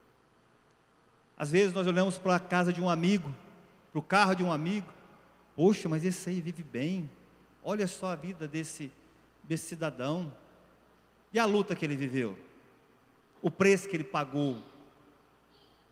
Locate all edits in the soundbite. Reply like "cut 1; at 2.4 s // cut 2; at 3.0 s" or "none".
cut 1; at 13.3 s